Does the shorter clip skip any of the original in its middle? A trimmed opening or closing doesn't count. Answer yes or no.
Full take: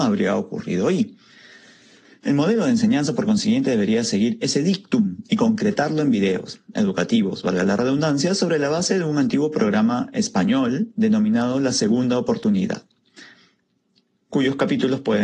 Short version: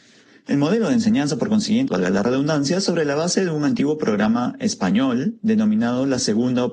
yes